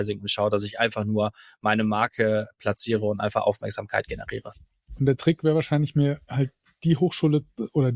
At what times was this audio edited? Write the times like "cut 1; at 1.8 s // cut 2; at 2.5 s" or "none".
none